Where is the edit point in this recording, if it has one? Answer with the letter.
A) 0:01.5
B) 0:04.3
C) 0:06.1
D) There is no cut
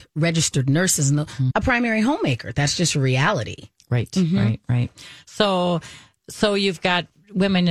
A